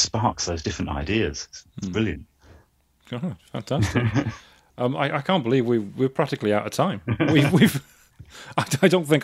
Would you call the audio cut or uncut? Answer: uncut